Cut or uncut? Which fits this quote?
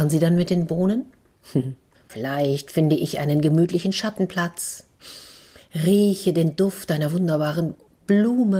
cut